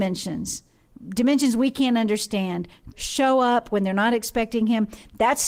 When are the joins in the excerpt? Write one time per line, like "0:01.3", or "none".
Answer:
0:02.9